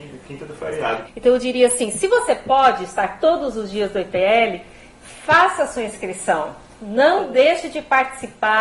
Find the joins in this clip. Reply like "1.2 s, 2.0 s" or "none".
1.0 s